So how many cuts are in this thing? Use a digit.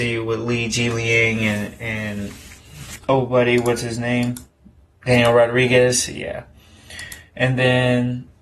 1